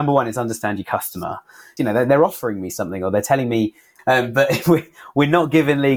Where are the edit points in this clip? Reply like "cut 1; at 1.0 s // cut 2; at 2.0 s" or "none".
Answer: cut 1; at 1.8 s // cut 2; at 4.0 s

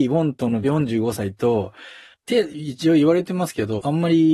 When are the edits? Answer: cut 1; at 2.1 s

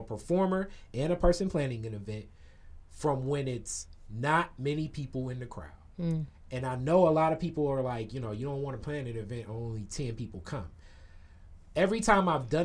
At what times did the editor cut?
none

